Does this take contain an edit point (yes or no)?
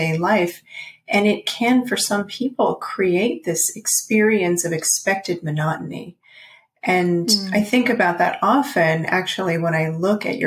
no